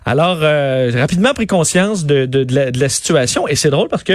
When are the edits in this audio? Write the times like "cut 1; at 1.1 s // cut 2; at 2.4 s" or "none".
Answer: none